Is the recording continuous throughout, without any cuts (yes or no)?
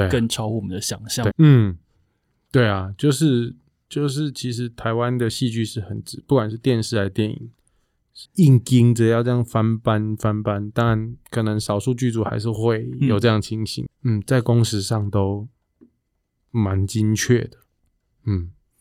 no